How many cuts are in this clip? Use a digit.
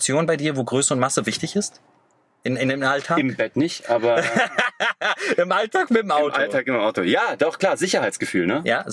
0